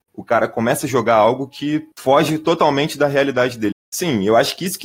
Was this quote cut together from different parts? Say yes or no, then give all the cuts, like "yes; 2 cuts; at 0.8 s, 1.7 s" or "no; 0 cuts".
yes; 2 cuts; at 1.9 s, 3.7 s